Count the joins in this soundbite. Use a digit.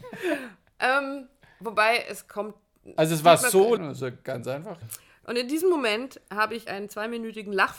3